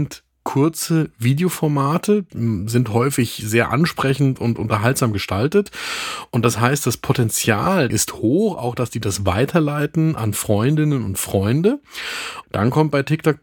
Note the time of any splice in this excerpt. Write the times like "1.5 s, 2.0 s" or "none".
2.3 s, 7.9 s, 12.4 s